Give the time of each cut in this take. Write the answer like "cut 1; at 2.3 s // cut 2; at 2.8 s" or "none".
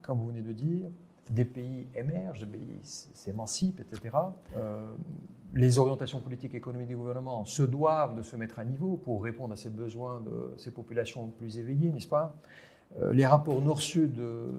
cut 1; at 4.5 s